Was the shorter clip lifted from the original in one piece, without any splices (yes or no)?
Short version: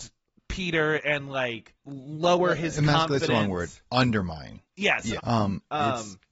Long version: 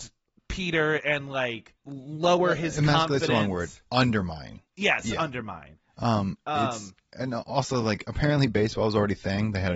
no